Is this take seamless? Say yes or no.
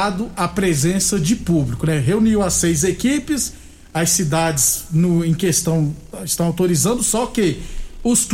yes